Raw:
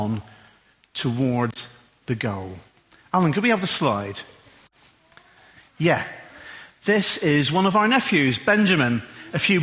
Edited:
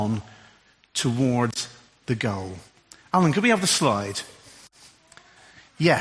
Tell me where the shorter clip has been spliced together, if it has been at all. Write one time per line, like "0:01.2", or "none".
none